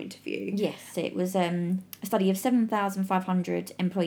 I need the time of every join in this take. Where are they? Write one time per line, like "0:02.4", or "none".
0:00.9